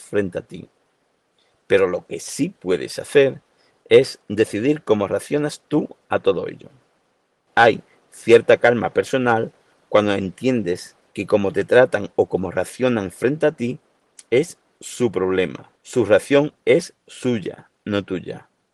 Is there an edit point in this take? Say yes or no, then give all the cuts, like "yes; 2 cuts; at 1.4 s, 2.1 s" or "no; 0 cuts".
yes; 2 cuts; at 7.5 s, 15.8 s